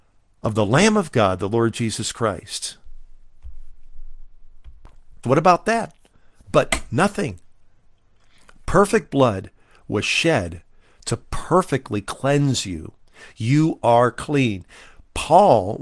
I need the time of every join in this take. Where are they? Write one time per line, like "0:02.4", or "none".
0:05.2